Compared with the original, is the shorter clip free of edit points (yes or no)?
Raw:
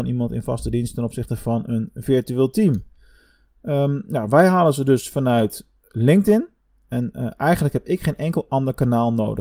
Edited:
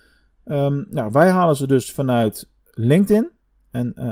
yes